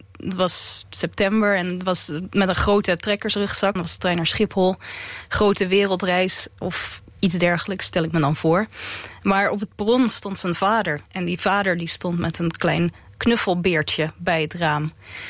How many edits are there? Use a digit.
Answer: 1